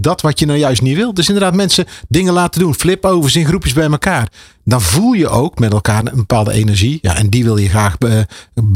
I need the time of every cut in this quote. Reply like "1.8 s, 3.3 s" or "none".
none